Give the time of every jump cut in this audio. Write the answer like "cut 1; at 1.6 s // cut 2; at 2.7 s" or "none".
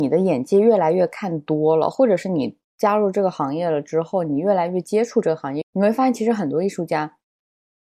cut 1; at 5.6 s